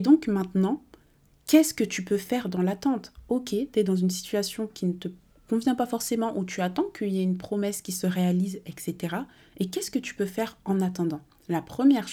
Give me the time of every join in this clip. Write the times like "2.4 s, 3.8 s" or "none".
none